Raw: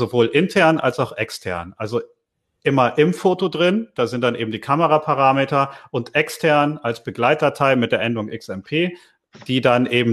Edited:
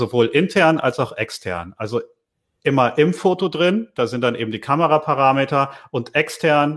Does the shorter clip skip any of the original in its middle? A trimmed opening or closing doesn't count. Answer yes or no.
no